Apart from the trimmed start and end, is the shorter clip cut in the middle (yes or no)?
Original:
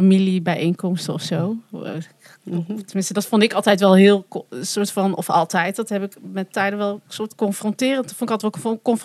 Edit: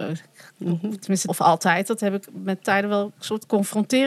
yes